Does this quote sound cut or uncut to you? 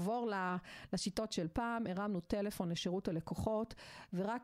uncut